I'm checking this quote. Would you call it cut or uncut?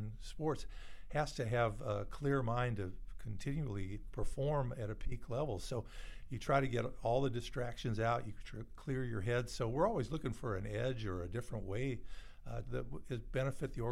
cut